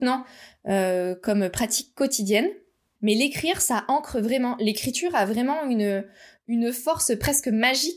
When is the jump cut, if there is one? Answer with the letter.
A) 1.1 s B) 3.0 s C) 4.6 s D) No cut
B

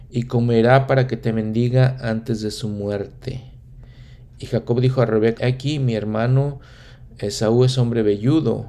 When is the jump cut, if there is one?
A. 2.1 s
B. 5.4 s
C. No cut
B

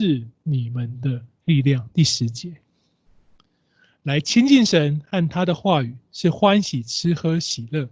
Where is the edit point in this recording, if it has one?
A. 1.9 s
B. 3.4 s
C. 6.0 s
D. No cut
D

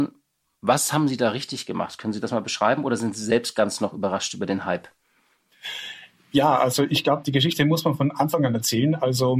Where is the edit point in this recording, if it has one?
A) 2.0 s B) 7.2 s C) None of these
B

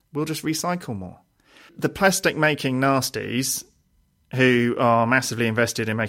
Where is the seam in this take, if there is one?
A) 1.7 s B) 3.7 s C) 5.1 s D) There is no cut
A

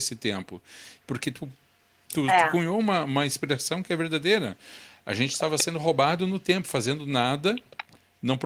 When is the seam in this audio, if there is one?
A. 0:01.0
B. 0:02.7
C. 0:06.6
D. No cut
A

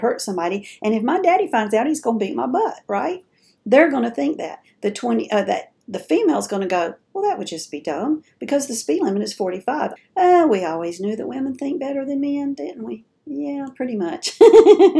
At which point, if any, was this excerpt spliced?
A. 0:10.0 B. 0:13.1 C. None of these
A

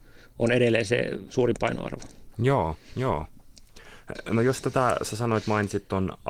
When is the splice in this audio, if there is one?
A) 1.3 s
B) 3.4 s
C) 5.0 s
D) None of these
A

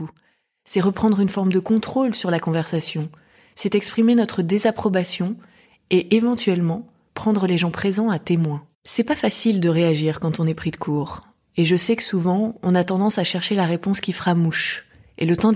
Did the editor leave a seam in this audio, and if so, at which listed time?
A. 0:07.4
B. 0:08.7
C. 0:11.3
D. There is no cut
B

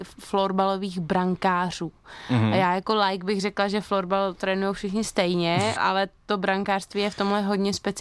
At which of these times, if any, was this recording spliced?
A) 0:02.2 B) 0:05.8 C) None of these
B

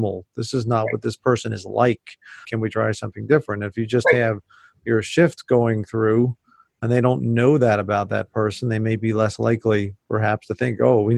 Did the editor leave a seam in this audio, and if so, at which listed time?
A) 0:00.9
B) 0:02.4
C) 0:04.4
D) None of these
B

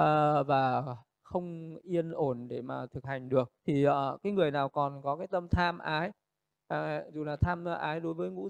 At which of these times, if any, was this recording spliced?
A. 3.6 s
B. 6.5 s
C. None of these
A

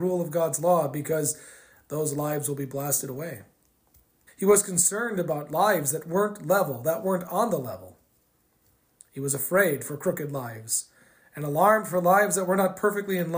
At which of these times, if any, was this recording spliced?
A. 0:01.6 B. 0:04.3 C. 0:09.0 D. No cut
B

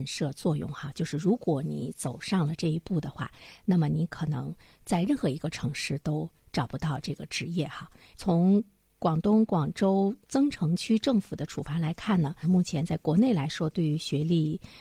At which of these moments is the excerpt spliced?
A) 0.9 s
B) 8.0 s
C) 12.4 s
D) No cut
C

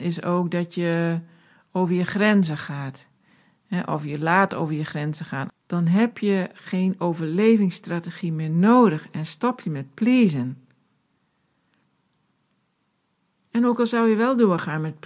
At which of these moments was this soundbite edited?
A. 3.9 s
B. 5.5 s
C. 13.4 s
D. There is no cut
B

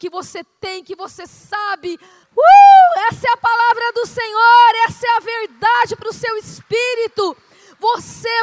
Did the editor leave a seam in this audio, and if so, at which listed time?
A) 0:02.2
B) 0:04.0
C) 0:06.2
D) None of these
A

